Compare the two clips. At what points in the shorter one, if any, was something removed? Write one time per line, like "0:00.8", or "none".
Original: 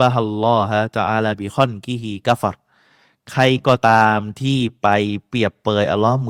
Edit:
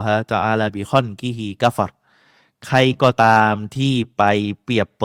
none